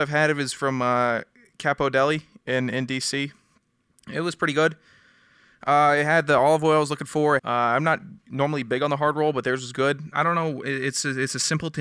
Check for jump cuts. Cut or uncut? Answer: cut